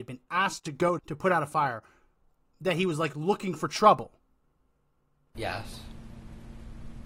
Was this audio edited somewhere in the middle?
yes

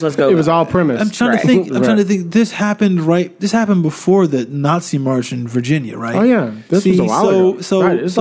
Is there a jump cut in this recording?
no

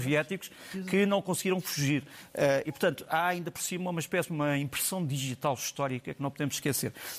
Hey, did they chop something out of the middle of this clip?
no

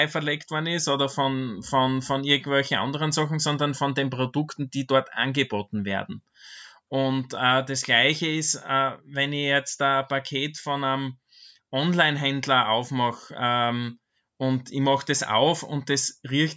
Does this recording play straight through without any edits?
yes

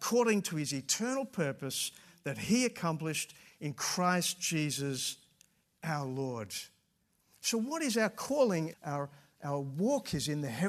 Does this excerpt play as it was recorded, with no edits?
no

